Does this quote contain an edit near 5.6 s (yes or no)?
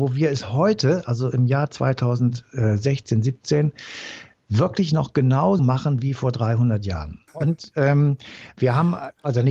yes